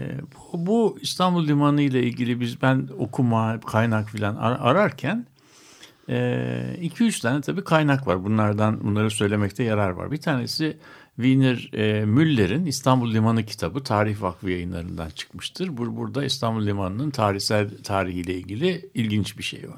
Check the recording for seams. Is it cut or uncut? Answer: uncut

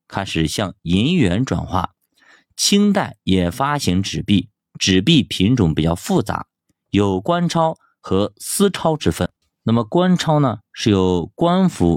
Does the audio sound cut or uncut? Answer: cut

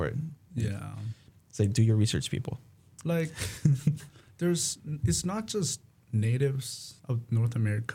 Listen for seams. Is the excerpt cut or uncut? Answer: cut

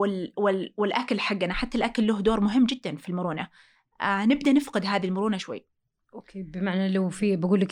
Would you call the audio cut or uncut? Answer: cut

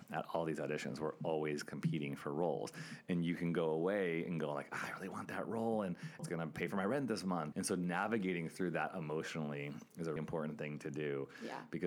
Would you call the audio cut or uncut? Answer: cut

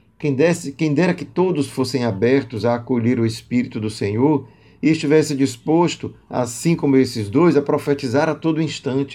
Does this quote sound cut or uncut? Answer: uncut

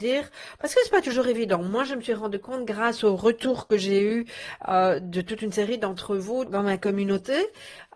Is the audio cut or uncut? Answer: cut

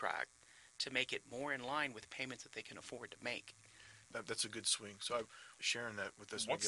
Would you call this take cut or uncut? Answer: cut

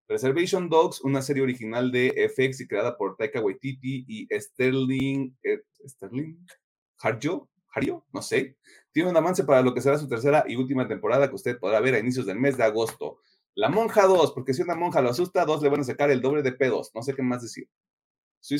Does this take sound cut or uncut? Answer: cut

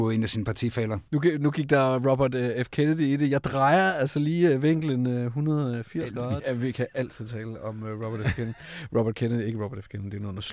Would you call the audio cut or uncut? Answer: cut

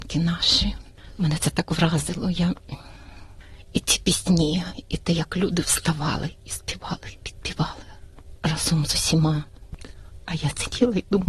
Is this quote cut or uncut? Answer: uncut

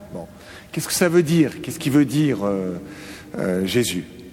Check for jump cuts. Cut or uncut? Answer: uncut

